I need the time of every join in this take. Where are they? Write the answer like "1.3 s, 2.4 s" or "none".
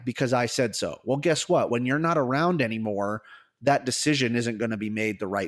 none